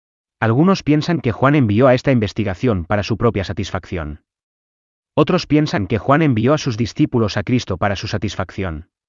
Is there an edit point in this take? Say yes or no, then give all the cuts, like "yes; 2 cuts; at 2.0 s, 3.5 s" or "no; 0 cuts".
yes; 1 cut; at 5.0 s